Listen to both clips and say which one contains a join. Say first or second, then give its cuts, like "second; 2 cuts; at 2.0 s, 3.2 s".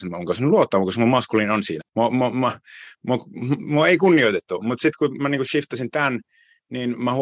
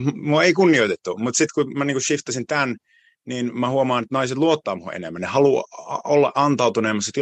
first; 1 cut; at 1.8 s